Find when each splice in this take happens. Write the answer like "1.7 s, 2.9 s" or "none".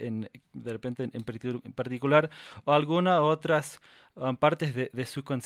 none